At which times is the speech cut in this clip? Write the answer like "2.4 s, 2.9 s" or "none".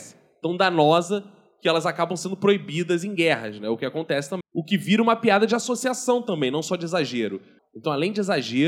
4.4 s, 7.6 s